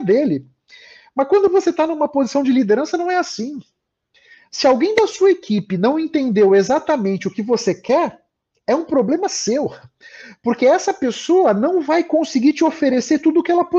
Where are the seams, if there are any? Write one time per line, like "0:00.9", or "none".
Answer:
none